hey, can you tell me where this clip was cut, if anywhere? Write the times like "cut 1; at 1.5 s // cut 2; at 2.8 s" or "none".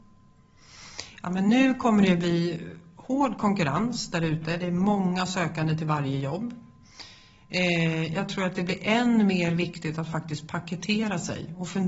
none